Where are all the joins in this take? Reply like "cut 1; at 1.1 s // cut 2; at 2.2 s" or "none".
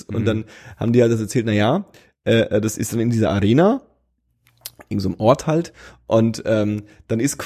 none